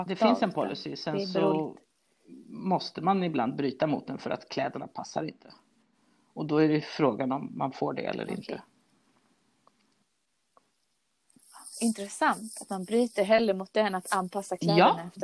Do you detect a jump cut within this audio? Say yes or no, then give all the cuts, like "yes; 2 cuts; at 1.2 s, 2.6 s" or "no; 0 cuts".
no; 0 cuts